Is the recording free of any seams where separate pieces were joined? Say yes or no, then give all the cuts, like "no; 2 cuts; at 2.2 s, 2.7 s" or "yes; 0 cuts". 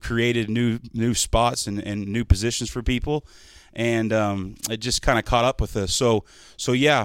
yes; 0 cuts